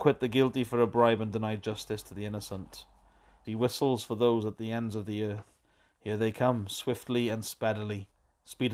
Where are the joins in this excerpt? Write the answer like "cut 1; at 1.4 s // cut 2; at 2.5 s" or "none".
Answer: cut 1; at 3.4 s